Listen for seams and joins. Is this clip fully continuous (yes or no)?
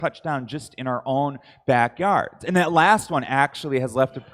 yes